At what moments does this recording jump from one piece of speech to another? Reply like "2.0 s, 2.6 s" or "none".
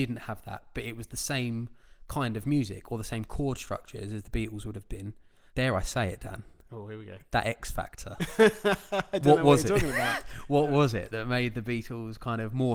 5.5 s

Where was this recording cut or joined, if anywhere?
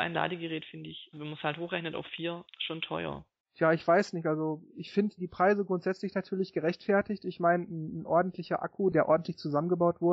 1.1 s

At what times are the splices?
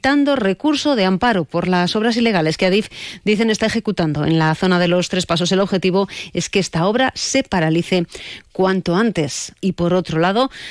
9.6 s

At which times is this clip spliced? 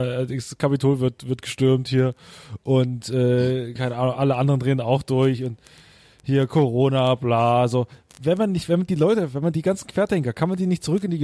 none

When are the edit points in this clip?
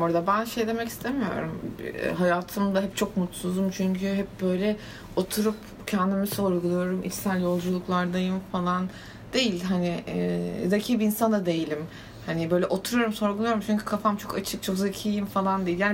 none

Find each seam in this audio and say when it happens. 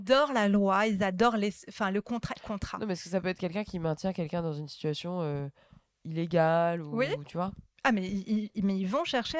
2.4 s

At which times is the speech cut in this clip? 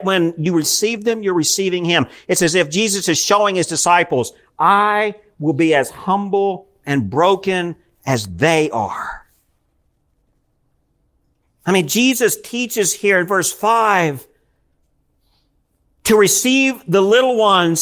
11.5 s

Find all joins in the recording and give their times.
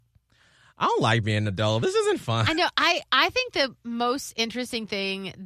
none

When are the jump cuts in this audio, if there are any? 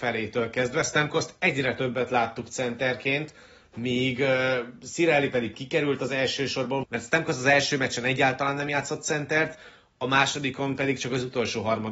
6.8 s

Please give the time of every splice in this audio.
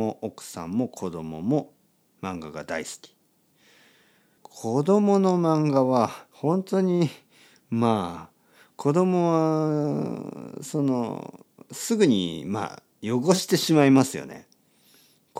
4.4 s, 6.3 s

